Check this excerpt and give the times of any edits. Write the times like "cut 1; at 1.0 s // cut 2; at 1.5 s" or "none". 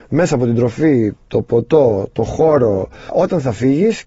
cut 1; at 3.1 s